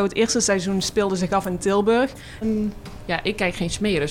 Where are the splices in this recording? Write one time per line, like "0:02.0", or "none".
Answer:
0:02.4